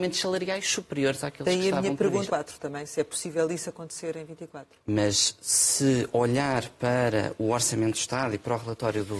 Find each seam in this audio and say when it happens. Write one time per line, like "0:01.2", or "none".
0:02.3